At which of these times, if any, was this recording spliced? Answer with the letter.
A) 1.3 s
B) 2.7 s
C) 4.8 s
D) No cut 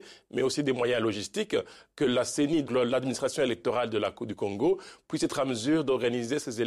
B